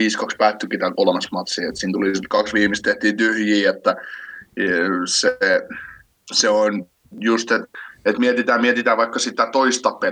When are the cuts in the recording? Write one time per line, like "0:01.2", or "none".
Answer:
none